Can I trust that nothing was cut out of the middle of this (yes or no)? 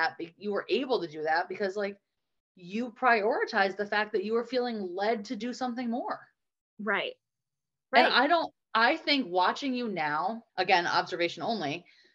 no